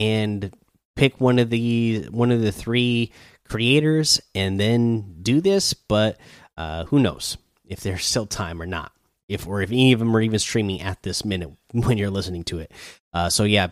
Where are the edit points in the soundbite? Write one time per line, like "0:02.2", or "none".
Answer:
none

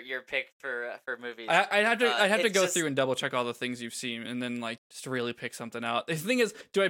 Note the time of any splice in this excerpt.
0:04.8

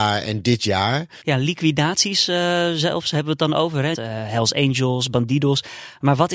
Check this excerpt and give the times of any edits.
0:01.2
0:03.9

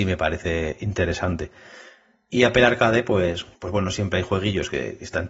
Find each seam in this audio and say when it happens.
0:03.5

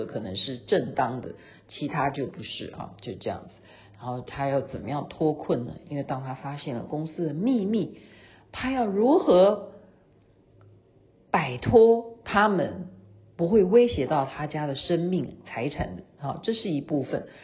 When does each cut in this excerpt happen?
none

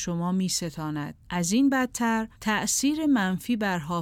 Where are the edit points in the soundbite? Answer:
0:01.2
0:02.4

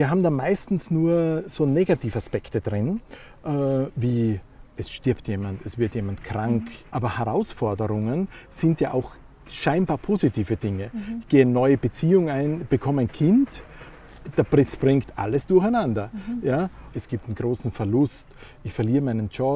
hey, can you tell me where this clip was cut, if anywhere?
0:06.9
0:16.9

